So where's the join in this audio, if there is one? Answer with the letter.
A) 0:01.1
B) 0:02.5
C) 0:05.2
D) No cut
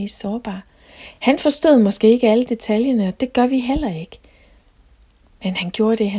D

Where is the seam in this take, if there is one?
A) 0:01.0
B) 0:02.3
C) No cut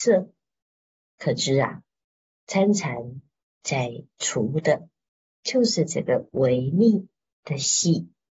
C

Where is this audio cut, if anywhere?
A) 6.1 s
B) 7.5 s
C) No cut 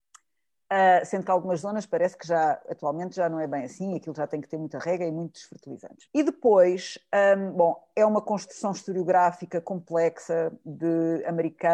A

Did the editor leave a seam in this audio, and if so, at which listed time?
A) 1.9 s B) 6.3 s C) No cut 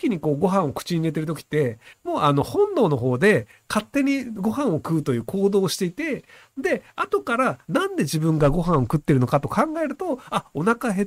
A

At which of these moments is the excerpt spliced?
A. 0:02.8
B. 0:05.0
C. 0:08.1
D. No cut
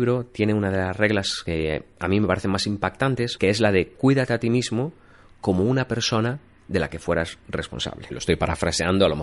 C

